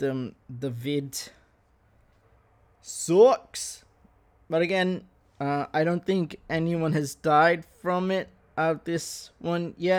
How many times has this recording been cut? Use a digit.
0